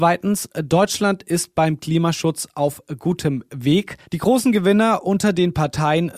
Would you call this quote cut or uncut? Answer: cut